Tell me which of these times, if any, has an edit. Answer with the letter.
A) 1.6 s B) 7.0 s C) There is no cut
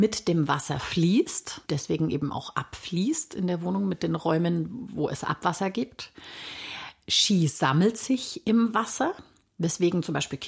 A